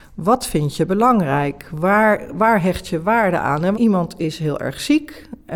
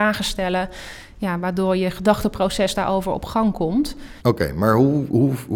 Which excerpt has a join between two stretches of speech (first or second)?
first